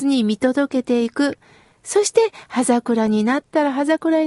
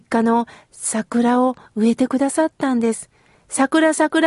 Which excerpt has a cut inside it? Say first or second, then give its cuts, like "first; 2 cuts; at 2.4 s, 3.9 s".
second; 1 cut; at 3.3 s